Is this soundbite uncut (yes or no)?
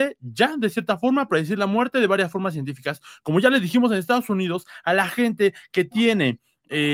yes